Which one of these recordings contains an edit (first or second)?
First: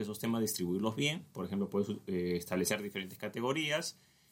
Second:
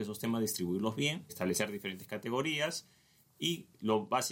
second